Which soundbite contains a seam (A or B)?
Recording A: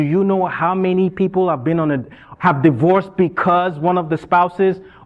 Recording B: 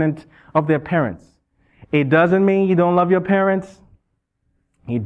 A